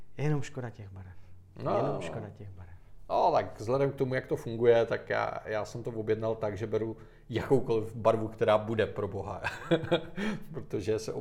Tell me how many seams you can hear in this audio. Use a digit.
0